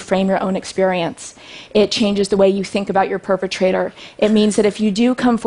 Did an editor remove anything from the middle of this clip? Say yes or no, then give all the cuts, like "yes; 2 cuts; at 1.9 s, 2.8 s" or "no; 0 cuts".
no; 0 cuts